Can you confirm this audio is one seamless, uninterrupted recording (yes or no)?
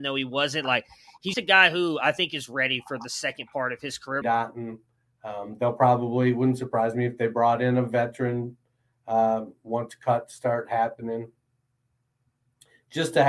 no